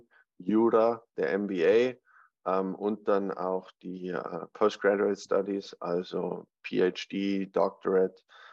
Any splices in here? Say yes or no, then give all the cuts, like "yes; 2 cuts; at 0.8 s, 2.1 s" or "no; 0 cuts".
no; 0 cuts